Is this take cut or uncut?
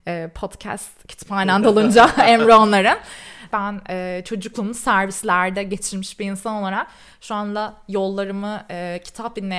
cut